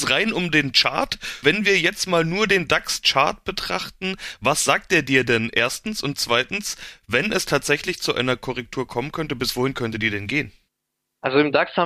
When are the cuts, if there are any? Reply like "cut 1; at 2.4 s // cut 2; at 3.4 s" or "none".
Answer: cut 1; at 1.4 s